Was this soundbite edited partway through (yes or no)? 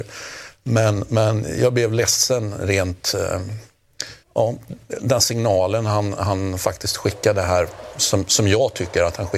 yes